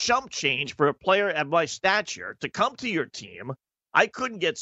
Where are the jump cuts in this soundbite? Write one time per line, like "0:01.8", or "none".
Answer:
none